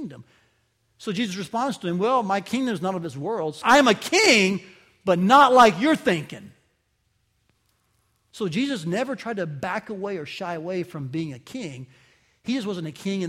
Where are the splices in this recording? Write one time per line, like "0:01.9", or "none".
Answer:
0:03.6
0:08.3